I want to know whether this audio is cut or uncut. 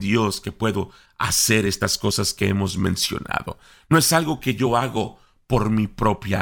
uncut